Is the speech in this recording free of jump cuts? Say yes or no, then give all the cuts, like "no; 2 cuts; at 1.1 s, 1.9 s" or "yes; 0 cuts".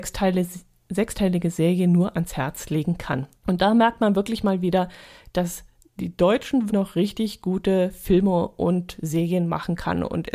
no; 2 cuts; at 3.4 s, 6.7 s